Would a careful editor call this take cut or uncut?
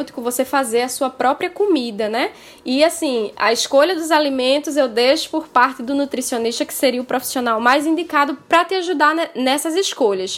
uncut